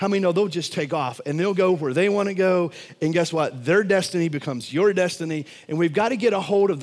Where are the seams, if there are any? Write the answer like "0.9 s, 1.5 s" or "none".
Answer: none